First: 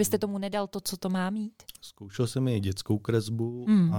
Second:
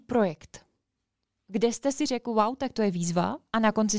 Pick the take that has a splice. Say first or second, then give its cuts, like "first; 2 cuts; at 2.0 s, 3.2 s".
first; 1 cut; at 1.8 s